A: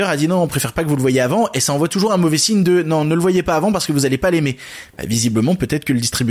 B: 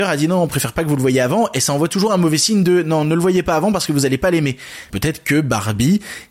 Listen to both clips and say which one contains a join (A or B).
B